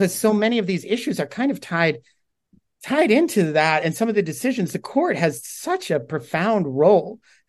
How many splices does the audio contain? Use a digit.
0